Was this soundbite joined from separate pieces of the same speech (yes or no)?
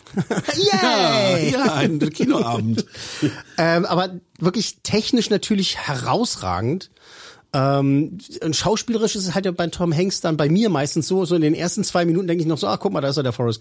no